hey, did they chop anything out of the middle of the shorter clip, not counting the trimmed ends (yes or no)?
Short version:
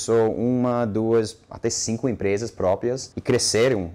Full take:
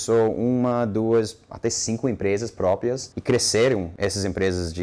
no